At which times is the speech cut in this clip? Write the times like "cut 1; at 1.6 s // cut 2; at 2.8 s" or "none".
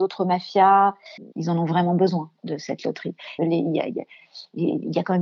cut 1; at 1.3 s // cut 2; at 3.4 s